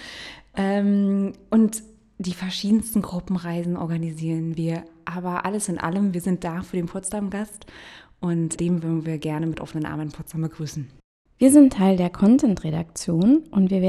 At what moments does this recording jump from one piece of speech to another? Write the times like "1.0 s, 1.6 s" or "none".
8.6 s